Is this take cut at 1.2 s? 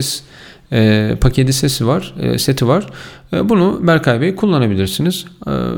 no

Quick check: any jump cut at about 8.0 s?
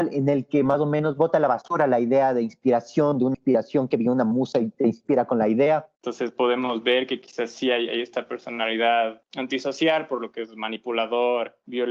no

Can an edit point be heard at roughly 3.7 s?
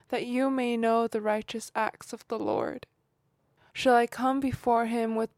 yes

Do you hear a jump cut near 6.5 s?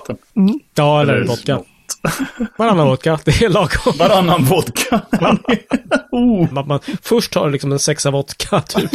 yes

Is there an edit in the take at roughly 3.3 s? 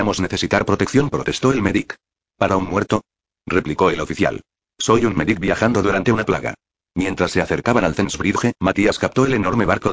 no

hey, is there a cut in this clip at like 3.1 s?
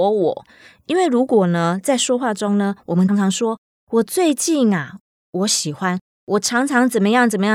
yes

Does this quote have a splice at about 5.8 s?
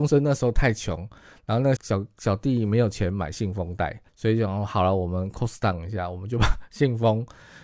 no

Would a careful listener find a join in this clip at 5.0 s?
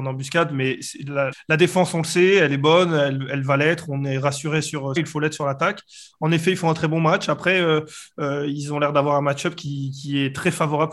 yes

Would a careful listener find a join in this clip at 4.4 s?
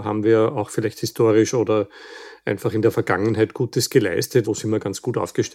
yes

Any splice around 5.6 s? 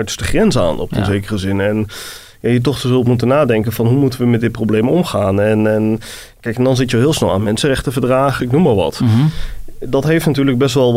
no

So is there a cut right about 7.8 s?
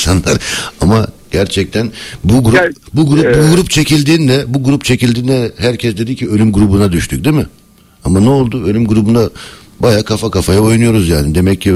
no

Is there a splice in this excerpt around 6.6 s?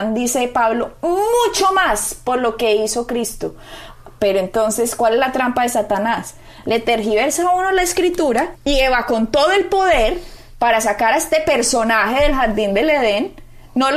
yes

